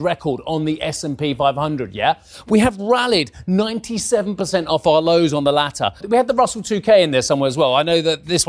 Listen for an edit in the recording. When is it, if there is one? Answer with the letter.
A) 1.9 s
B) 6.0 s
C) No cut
B